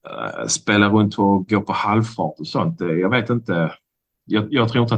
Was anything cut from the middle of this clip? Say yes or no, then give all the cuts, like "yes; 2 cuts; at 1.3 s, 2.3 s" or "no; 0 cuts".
no; 0 cuts